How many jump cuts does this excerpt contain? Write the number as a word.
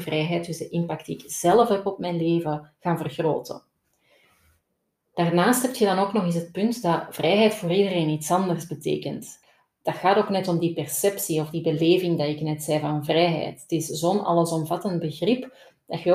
zero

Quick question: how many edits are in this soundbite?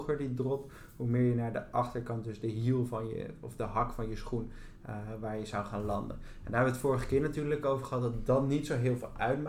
zero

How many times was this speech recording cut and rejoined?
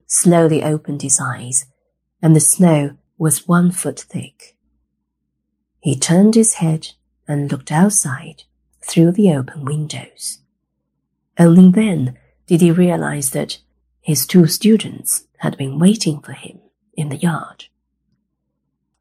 zero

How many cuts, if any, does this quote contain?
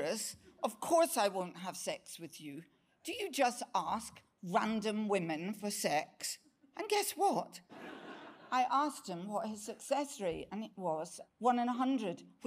two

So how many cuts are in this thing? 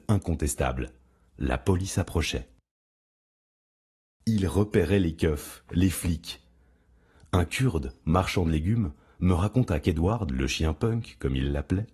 zero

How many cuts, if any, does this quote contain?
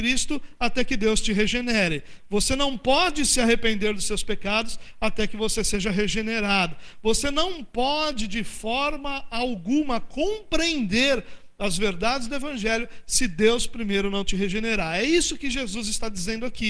zero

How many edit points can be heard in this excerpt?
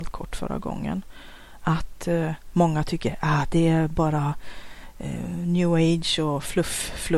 zero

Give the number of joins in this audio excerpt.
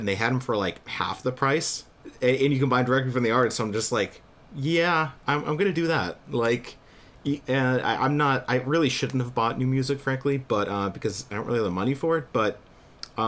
one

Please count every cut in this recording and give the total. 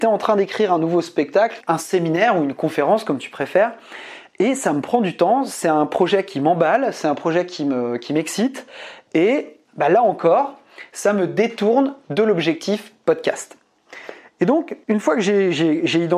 two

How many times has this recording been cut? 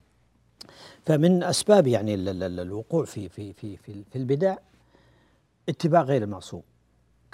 zero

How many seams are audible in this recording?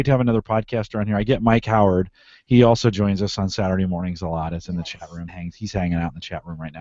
one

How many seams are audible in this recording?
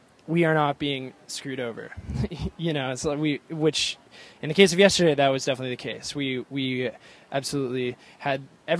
zero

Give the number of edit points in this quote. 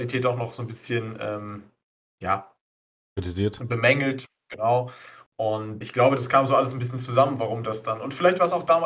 one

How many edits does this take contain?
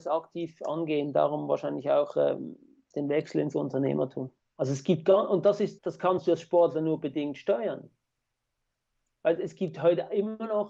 two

